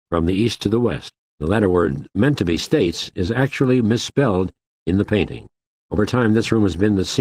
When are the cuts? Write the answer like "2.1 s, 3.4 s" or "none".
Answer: 1.3 s